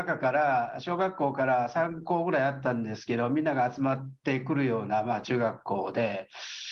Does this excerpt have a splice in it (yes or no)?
no